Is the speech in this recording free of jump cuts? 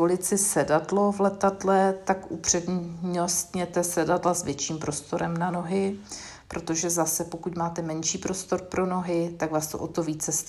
yes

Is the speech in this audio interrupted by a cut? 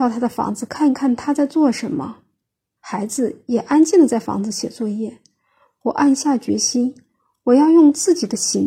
yes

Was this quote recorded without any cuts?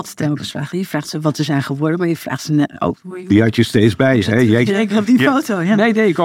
yes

